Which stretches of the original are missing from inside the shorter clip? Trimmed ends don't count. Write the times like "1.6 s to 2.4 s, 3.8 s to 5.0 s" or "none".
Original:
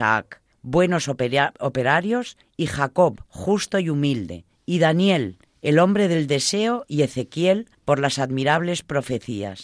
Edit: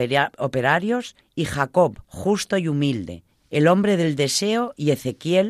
4.6 s to 5.5 s